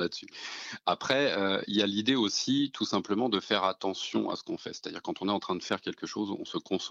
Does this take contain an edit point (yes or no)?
no